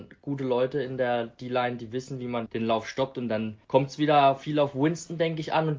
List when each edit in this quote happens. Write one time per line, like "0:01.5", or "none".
0:02.5
0:03.6